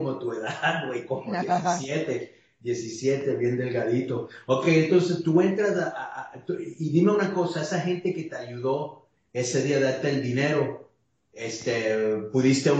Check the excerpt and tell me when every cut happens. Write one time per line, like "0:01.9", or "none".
none